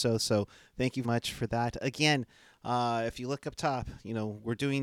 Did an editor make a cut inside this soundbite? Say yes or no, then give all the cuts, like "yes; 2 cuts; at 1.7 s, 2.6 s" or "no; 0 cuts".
yes; 1 cut; at 1.0 s